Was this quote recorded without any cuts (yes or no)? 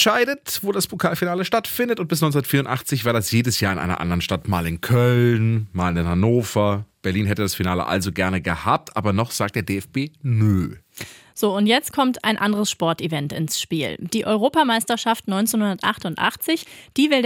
yes